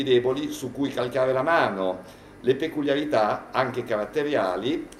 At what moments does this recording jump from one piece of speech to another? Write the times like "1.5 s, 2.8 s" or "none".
none